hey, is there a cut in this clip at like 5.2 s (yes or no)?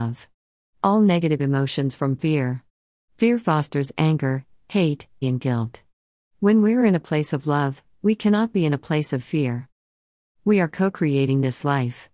yes